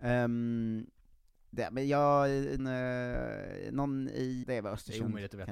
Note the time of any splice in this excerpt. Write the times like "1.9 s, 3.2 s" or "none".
2.6 s, 4.4 s